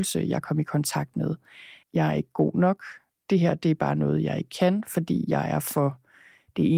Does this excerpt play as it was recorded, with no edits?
no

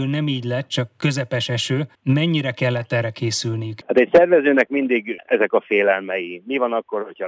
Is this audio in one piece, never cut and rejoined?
yes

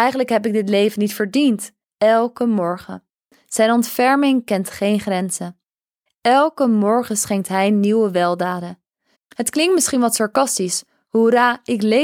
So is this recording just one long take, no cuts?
no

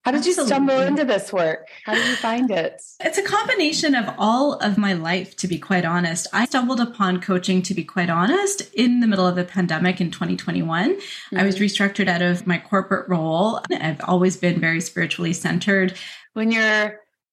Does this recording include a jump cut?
yes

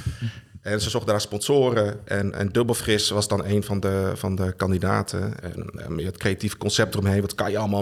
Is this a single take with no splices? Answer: no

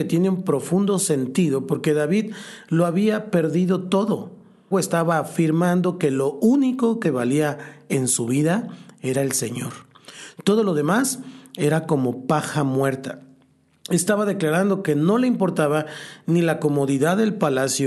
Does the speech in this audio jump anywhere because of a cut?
yes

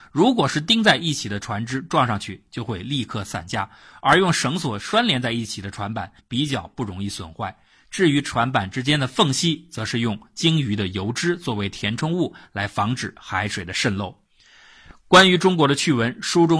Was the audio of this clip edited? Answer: yes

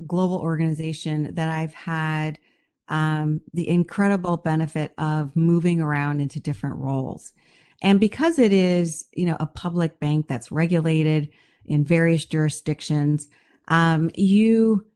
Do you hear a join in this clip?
no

